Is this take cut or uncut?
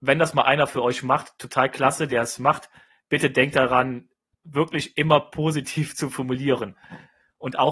cut